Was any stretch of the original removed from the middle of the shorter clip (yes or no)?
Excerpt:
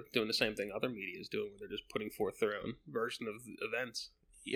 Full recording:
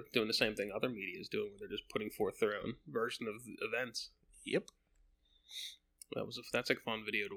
no